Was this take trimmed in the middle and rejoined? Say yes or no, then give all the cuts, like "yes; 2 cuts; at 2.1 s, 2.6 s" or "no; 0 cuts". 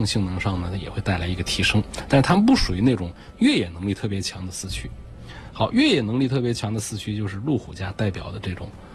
no; 0 cuts